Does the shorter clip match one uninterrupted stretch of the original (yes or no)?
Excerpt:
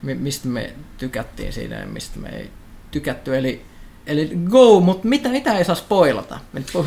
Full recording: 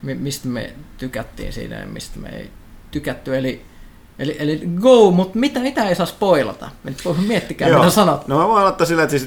no